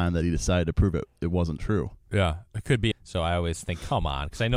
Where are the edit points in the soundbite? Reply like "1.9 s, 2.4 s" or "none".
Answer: 2.9 s